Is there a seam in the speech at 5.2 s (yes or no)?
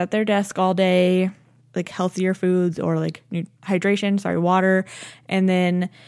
no